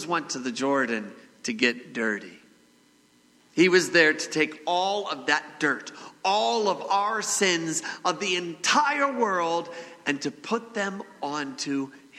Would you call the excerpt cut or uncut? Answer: uncut